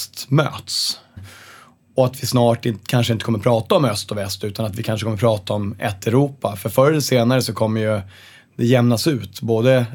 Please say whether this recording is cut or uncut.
cut